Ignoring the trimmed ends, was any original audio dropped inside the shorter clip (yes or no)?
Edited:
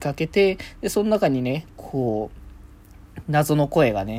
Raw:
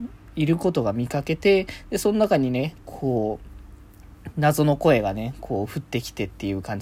no